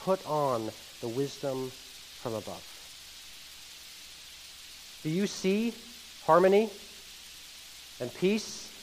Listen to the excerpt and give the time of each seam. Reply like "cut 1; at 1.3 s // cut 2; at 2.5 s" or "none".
none